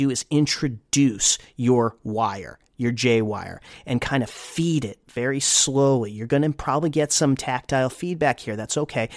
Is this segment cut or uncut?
uncut